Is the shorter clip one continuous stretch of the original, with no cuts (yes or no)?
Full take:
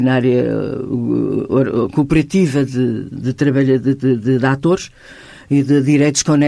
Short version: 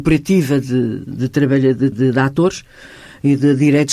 no